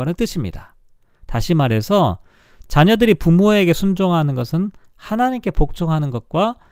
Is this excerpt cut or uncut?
uncut